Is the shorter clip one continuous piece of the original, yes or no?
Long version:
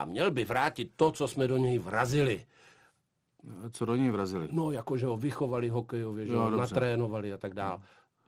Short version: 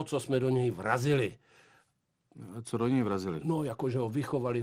yes